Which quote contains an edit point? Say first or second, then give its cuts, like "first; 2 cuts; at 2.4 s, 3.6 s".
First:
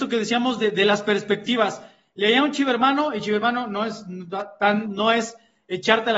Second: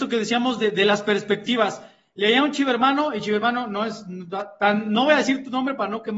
first; 1 cut; at 4.8 s